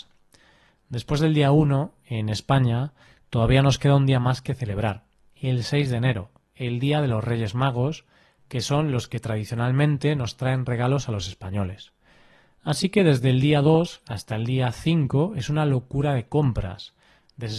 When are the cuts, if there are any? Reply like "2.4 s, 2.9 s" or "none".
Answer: none